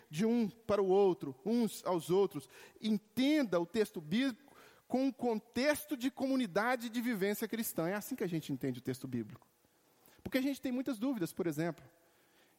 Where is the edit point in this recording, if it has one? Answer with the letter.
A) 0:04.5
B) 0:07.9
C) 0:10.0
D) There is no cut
D